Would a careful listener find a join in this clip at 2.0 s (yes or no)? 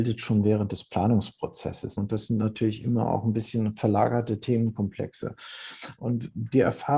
yes